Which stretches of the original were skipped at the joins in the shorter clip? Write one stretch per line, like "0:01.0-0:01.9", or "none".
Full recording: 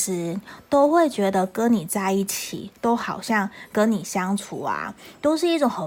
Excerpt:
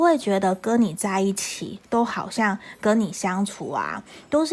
none

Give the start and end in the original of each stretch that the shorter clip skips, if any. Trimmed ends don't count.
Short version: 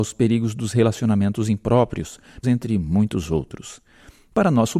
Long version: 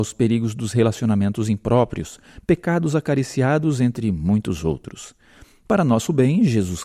0:02.4-0:03.8

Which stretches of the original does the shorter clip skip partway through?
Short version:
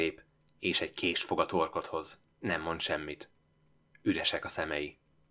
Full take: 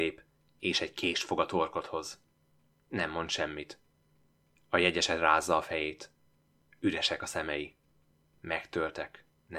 0:02.3-0:02.8
0:04.4-0:06.7

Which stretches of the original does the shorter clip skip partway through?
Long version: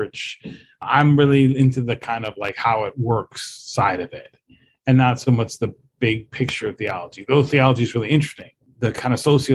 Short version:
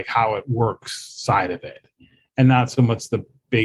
none

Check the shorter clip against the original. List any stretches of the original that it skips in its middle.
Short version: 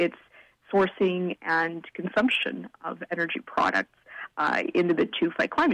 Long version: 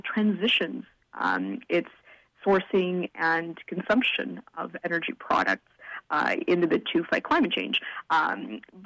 none

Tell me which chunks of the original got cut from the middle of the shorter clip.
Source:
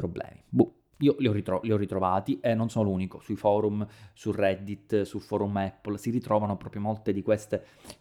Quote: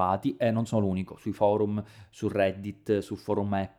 none

